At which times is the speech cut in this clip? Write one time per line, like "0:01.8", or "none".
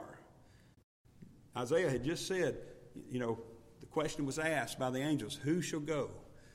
none

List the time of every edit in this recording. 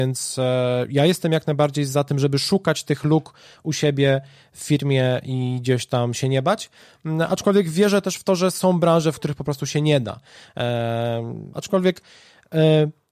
0:11.5

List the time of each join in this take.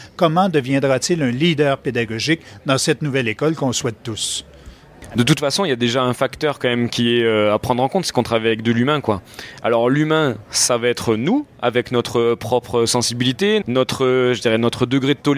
0:13.6

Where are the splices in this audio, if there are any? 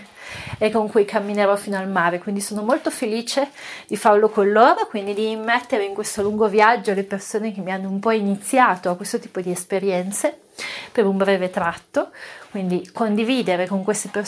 none

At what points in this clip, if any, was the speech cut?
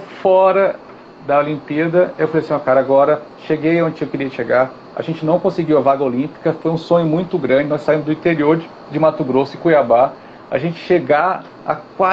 none

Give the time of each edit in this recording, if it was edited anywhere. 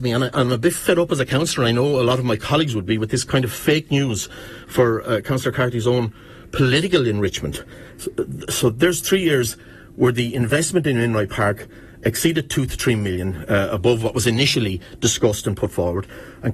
0:07.9

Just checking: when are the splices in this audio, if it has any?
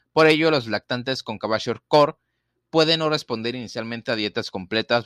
none

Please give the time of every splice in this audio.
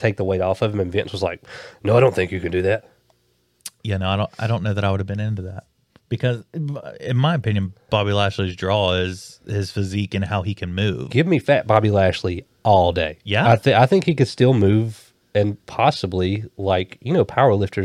none

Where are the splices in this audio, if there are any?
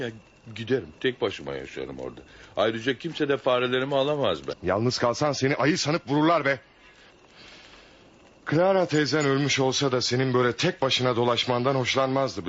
0:04.5

